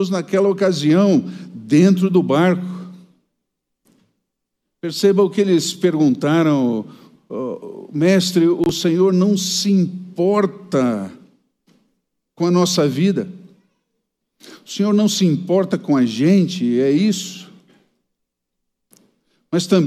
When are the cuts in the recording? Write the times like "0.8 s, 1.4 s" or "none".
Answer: none